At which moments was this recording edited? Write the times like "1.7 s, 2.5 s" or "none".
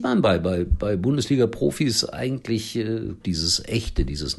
3.2 s